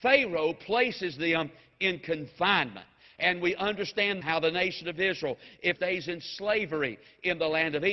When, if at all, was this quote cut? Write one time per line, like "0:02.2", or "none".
0:04.2
0:05.8